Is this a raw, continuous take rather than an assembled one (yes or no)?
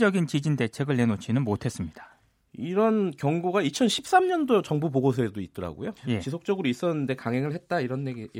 no